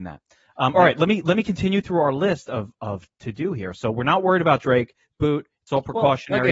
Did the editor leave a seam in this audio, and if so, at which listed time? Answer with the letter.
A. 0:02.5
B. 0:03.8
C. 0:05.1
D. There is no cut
D